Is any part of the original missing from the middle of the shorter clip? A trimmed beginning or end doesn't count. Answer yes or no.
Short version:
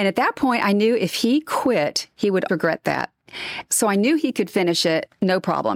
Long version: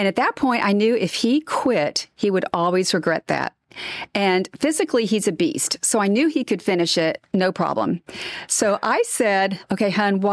yes